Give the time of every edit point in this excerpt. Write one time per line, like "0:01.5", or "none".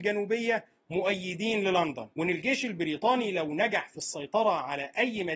0:02.1